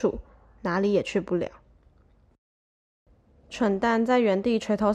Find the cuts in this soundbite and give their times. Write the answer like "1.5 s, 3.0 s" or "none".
none